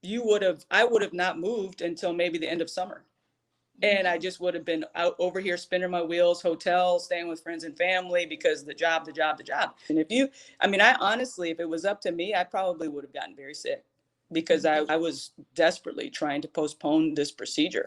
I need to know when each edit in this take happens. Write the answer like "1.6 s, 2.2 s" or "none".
9.9 s, 14.9 s